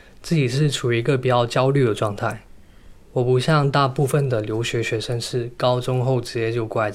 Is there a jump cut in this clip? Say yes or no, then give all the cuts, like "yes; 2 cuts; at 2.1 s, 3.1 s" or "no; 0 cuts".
no; 0 cuts